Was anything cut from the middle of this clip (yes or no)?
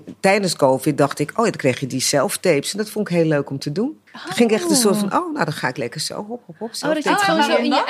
yes